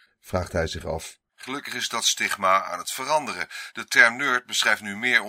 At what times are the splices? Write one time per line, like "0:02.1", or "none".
0:01.3